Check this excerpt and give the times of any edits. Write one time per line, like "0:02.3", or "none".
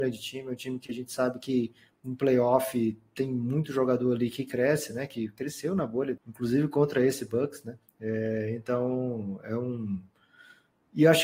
0:06.2
0:07.9